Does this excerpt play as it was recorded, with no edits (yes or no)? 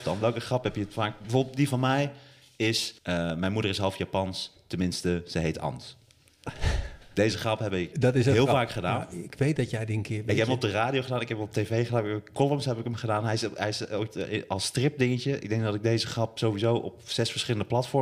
no